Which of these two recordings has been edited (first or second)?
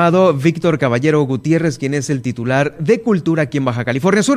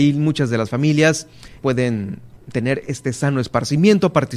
second